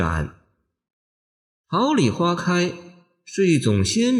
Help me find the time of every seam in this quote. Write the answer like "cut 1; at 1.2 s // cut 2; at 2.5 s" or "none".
none